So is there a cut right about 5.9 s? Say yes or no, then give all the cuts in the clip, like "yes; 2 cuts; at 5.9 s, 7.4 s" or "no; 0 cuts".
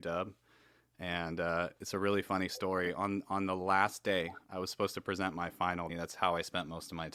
yes; 1 cut; at 5.9 s